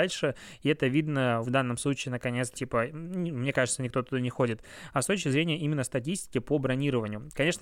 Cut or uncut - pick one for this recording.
cut